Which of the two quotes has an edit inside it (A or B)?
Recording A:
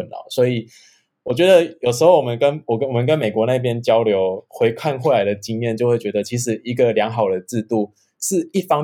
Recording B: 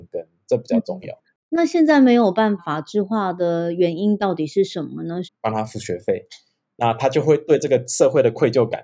B